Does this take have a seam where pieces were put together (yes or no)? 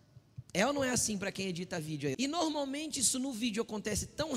yes